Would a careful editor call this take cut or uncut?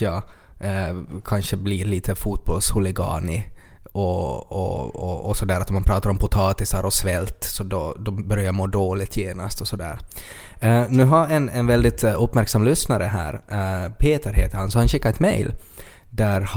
uncut